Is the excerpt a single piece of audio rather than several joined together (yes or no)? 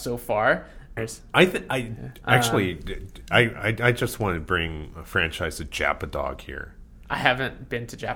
no